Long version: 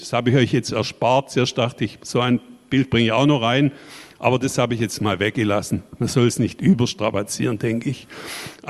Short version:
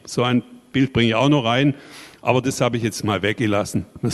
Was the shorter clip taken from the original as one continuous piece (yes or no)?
yes